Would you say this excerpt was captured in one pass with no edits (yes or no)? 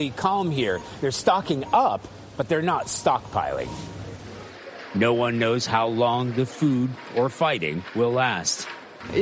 no